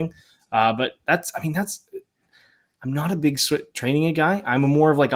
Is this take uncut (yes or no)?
yes